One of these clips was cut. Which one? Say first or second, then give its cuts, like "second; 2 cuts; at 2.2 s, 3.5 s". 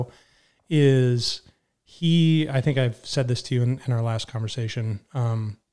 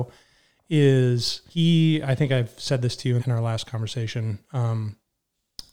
second; 2 cuts; at 1.5 s, 3.2 s